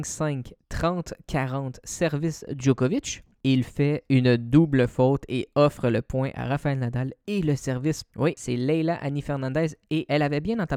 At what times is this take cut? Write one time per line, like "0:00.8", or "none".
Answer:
0:08.1

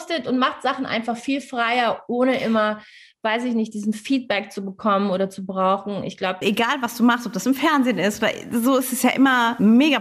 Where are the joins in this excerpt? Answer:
0:06.4

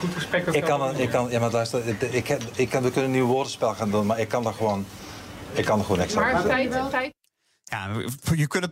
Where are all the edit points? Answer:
none

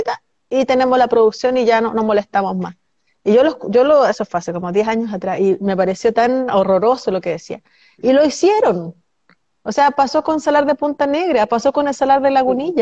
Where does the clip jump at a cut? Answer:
none

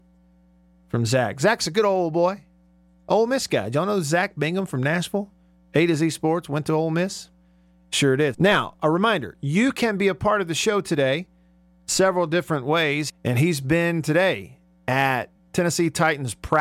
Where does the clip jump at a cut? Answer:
0:08.3
0:13.1

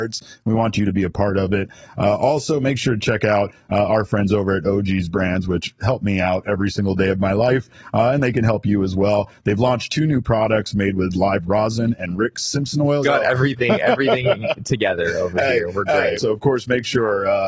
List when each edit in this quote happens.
0:13.0
0:16.2

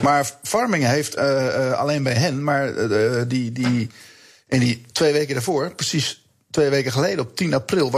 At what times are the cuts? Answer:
0:01.2

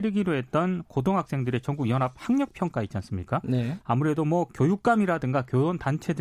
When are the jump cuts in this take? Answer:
0:03.8

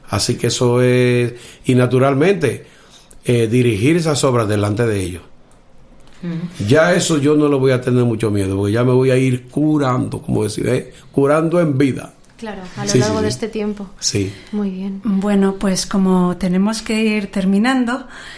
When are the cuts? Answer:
none

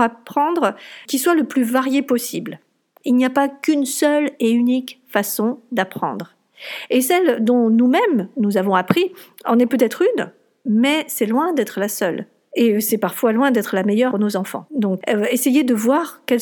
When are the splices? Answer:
0:01.1
0:03.0

